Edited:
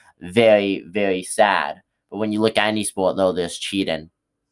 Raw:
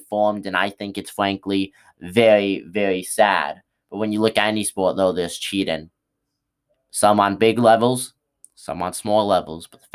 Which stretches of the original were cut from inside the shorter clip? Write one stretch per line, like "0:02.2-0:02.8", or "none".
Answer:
none